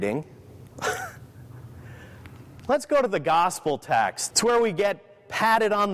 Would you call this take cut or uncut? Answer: cut